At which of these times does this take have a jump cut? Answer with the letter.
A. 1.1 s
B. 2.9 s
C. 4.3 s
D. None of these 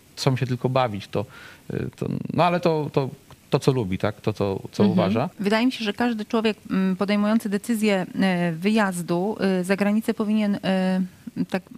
D